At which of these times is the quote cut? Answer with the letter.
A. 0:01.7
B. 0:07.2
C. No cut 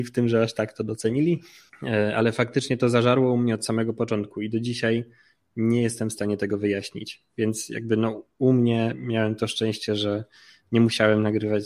A